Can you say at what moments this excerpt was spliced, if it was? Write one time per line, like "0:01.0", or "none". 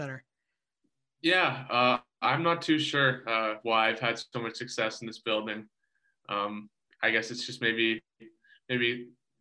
none